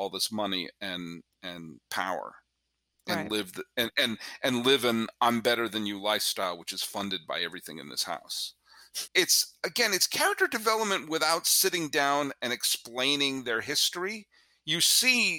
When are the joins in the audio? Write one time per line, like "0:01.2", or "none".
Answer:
0:09.1